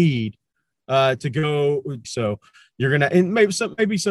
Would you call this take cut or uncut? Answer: cut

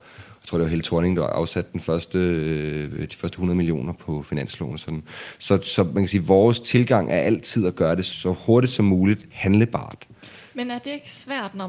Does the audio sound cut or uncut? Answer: uncut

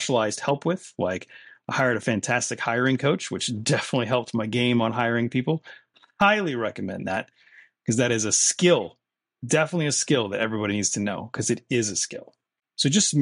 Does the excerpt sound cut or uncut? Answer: uncut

